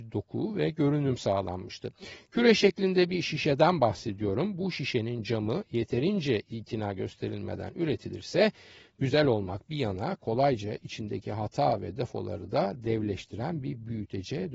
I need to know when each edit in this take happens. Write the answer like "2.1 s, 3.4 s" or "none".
none